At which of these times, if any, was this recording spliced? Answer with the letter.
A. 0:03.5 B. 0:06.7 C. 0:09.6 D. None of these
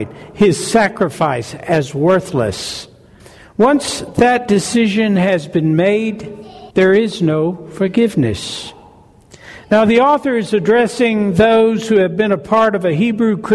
B